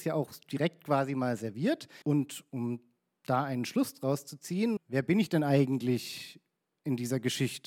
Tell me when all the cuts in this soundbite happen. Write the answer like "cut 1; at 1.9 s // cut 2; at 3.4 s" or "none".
cut 1; at 2.0 s // cut 2; at 4.8 s